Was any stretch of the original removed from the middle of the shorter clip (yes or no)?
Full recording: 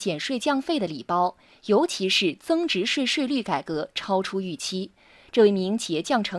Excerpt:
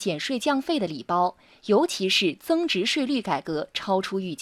yes